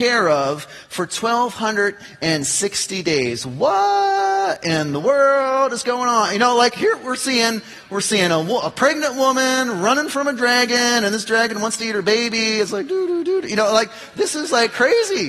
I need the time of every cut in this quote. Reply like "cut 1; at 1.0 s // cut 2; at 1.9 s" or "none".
none